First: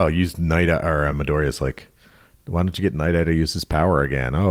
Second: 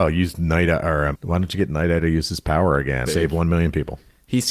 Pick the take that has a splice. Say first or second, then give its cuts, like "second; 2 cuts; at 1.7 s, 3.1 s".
second; 2 cuts; at 1.1 s, 3.1 s